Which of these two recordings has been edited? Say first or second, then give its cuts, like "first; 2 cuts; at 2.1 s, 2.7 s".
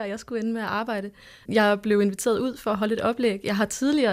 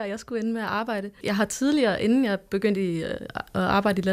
second; 1 cut; at 1.2 s